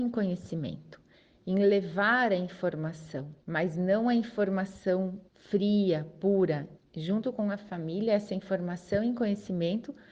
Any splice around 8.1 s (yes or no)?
no